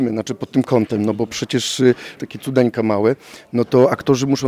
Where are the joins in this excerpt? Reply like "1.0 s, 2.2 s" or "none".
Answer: 2.2 s